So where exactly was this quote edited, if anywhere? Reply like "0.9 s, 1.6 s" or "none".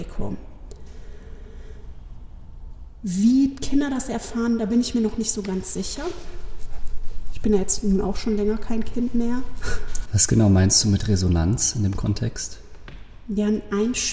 10.1 s